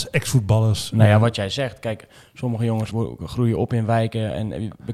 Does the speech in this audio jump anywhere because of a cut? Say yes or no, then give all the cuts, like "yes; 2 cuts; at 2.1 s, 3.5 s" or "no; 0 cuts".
yes; 1 cut; at 2.9 s